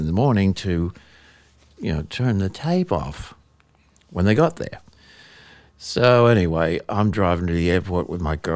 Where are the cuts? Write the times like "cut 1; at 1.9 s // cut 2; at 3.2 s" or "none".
none